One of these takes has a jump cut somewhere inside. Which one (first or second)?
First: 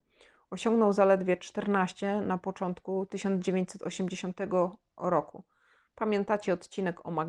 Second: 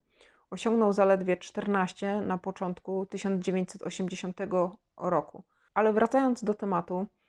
second